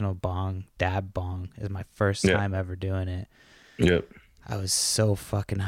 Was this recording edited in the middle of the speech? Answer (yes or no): no